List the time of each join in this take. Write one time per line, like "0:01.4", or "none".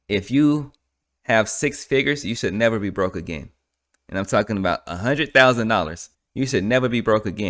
none